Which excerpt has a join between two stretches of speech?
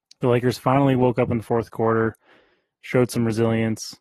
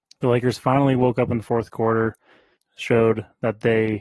second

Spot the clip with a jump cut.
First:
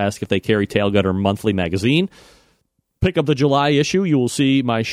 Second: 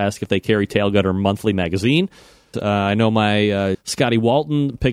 second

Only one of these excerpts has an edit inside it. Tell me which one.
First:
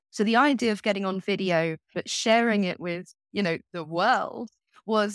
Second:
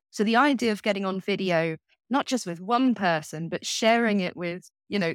first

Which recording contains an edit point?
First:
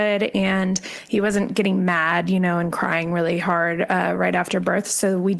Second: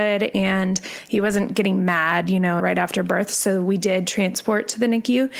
second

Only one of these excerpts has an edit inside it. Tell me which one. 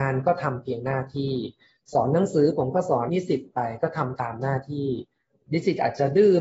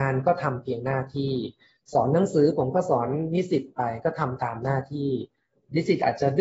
first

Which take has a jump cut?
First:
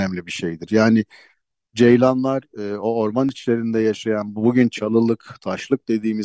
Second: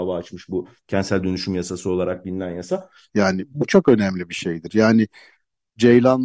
second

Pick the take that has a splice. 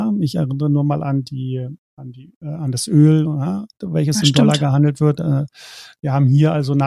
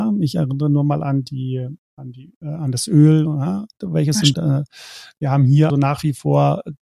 second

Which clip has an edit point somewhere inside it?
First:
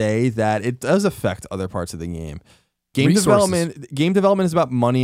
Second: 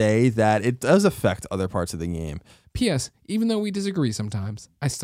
second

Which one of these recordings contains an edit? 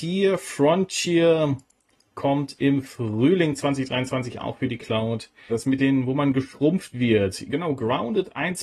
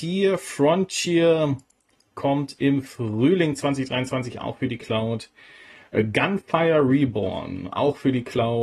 first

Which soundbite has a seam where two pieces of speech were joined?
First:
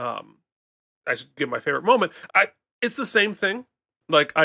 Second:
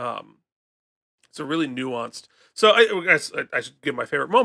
first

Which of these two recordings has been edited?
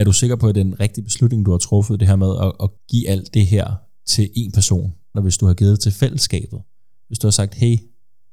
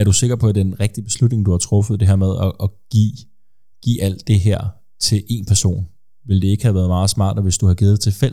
first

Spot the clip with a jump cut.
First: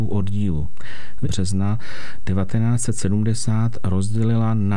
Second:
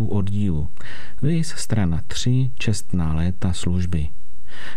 first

